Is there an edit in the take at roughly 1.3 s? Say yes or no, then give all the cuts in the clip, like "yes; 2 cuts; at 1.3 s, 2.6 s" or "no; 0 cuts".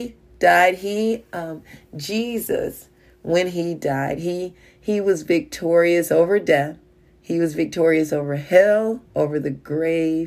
no; 1 cut; at 9.0 s